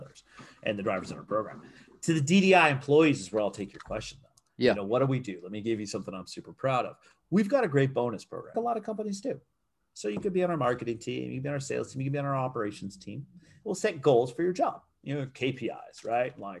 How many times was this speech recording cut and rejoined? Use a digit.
1